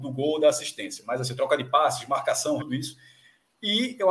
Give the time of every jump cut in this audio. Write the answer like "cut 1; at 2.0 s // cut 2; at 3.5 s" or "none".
cut 1; at 2.6 s